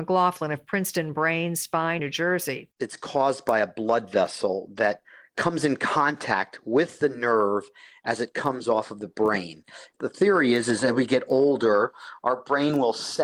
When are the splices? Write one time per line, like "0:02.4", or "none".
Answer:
0:02.0